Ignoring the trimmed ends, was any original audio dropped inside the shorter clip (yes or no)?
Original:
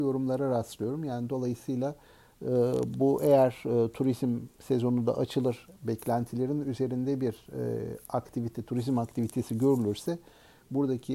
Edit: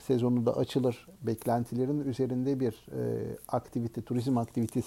no